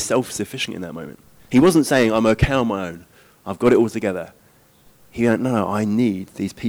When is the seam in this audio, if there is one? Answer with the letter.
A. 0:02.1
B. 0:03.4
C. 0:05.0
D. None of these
D